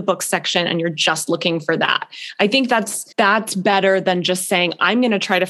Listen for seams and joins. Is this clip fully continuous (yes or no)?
no